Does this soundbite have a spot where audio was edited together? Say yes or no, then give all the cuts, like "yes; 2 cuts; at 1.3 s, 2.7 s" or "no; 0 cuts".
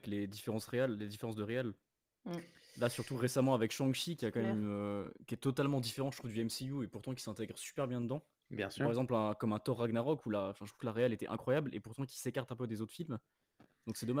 no; 0 cuts